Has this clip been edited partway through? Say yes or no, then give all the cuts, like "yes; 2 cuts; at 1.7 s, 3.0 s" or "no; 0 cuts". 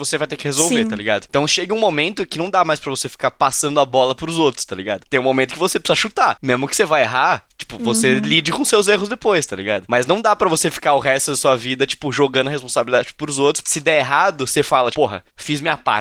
yes; 2 cuts; at 13.6 s, 14.9 s